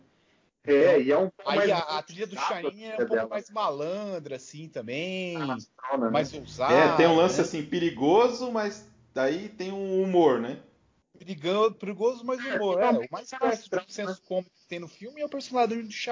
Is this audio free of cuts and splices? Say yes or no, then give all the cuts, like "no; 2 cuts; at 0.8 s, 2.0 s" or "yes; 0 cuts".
yes; 0 cuts